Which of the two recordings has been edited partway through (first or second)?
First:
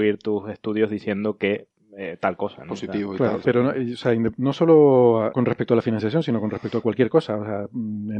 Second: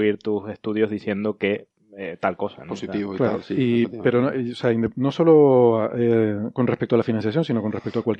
first